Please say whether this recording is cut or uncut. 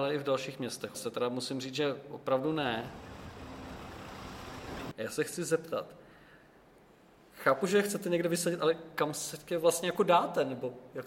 cut